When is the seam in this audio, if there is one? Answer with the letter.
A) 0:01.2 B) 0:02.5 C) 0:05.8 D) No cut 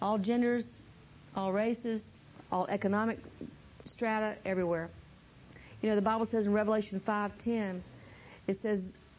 B